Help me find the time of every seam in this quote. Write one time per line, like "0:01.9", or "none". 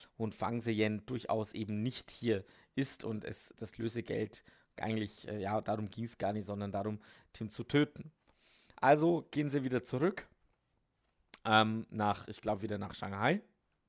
none